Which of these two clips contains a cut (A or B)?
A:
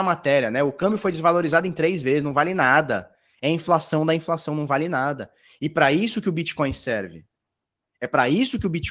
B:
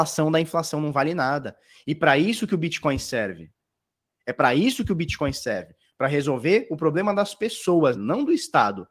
B